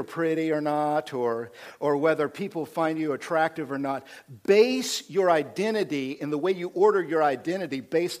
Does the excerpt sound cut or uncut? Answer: uncut